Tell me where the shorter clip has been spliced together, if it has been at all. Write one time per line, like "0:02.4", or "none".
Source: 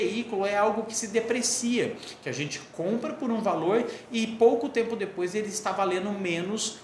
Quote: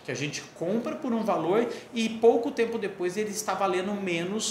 none